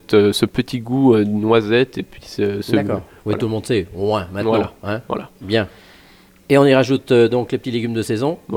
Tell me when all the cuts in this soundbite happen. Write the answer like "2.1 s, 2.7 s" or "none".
none